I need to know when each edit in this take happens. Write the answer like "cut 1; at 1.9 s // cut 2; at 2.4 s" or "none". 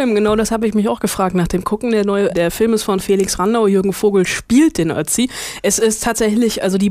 cut 1; at 2.3 s